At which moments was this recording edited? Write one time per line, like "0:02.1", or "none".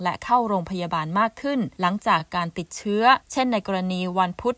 none